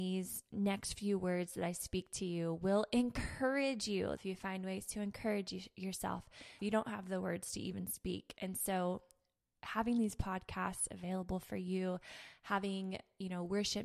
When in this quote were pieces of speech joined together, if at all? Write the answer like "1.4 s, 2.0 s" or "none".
4.2 s, 6.6 s